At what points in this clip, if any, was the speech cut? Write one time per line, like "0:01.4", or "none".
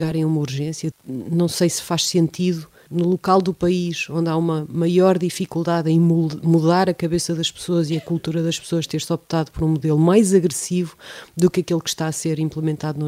0:00.9
0:02.9